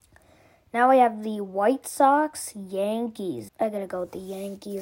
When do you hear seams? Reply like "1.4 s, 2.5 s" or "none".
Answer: 3.5 s